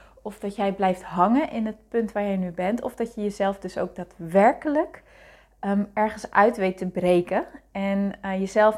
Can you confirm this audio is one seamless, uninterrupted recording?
yes; 0 cuts

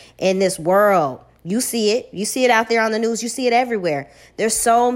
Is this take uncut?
yes; 0 cuts

